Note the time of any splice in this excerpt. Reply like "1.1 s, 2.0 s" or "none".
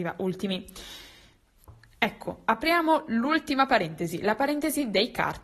none